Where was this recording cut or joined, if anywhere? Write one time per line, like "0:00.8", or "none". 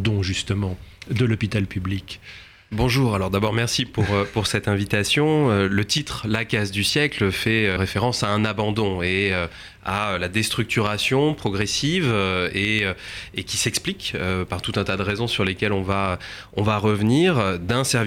0:07.8